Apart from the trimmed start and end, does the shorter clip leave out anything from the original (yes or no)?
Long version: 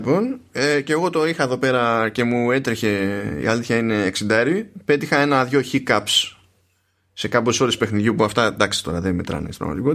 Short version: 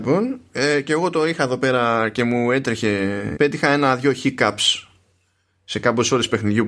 yes